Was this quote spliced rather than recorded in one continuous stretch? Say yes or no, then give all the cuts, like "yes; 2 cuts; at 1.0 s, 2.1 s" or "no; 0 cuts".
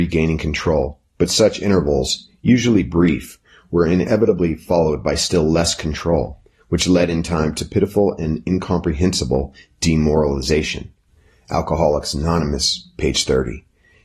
no; 0 cuts